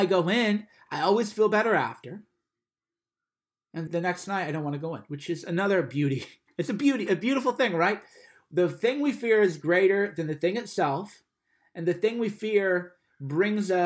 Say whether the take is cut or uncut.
cut